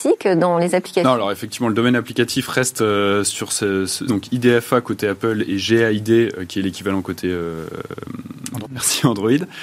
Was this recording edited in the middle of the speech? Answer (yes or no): yes